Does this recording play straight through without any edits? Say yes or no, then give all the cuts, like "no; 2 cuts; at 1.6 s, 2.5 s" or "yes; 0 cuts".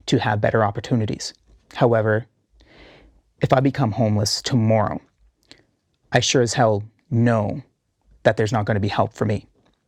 yes; 0 cuts